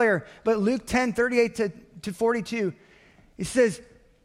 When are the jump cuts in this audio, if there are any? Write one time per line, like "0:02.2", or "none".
none